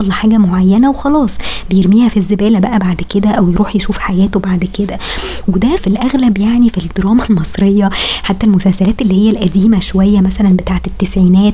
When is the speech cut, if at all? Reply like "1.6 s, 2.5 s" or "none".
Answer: 5.8 s